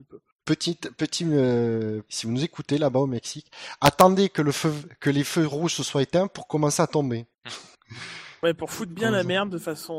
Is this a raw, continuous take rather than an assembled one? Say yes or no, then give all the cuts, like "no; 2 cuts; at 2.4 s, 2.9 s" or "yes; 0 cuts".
no; 1 cut; at 2.1 s